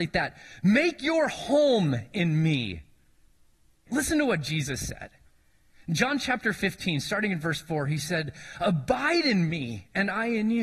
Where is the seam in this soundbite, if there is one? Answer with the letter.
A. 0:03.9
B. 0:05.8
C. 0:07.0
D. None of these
A